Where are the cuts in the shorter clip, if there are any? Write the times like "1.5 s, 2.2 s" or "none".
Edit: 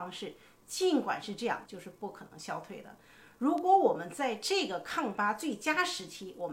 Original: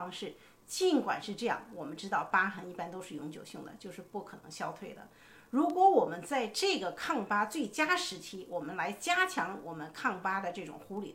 1.7 s